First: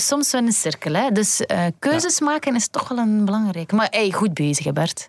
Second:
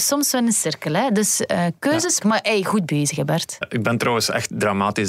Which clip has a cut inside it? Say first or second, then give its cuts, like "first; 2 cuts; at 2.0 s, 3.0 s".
second; 2 cuts; at 2.2 s, 3.6 s